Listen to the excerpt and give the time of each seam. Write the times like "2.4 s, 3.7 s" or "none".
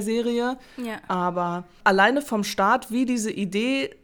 none